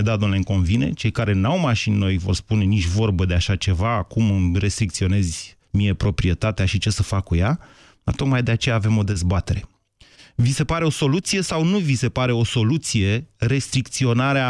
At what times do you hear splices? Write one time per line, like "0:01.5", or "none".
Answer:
0:05.6